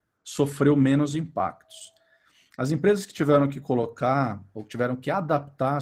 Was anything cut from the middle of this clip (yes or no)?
no